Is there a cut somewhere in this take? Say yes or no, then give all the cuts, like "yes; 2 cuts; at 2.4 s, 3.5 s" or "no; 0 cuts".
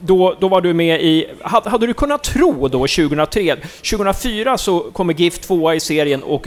yes; 1 cut; at 3.6 s